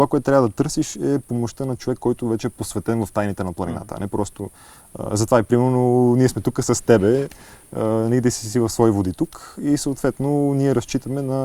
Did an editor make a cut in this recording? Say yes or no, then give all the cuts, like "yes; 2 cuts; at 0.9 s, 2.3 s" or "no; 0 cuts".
no; 0 cuts